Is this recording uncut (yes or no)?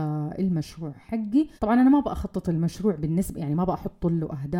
no